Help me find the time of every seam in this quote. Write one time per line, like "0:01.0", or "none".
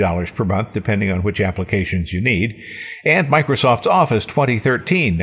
none